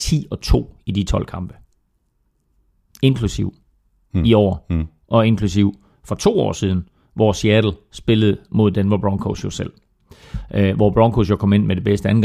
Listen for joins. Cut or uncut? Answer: uncut